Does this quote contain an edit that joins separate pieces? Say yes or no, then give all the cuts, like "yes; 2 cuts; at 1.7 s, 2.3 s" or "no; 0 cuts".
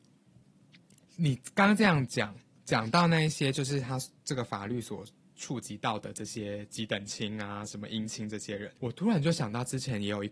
yes; 2 cuts; at 1.0 s, 8.8 s